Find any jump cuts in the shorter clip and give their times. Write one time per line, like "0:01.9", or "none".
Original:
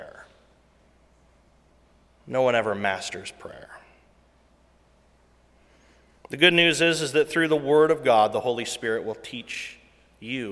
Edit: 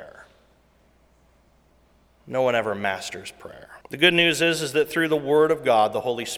0:03.8

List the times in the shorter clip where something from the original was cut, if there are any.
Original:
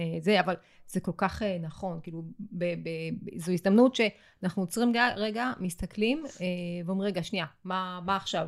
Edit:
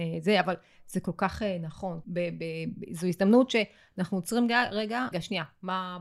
0:02.0
0:05.1

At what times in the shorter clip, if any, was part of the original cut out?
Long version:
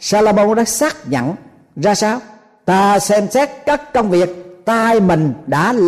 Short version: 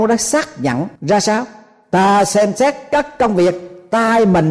0:01.0

